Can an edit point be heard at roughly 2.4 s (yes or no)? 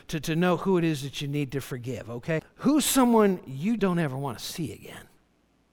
yes